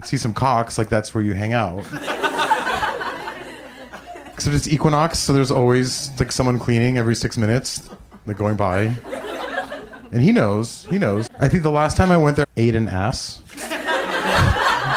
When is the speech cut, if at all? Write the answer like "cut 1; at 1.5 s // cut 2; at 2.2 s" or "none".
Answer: cut 1; at 11.3 s // cut 2; at 12.4 s